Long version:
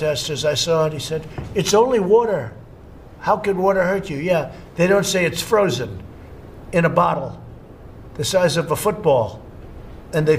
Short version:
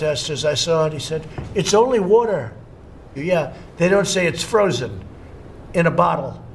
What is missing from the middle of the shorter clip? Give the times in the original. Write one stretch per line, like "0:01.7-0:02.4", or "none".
0:03.2-0:04.1